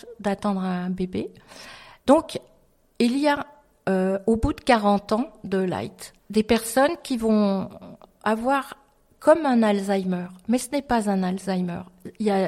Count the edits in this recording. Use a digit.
2